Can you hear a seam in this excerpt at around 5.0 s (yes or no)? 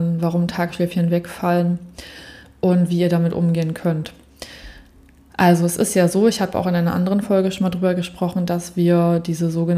no